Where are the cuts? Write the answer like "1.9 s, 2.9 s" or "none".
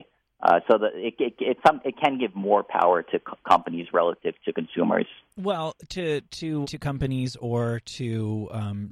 6.6 s